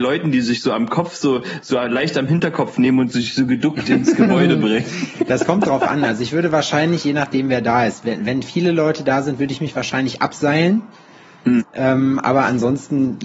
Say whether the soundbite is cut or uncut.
cut